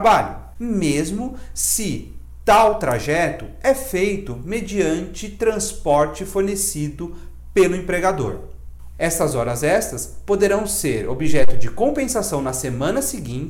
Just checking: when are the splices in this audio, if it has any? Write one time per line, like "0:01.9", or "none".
0:08.9